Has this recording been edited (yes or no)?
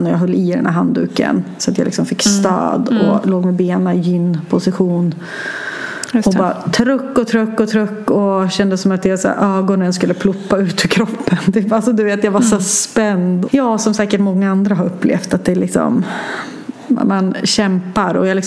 yes